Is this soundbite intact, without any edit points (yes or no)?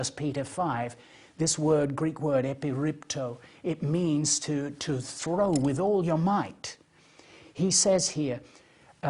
yes